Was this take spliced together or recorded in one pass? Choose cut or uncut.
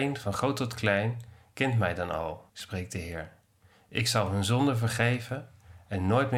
cut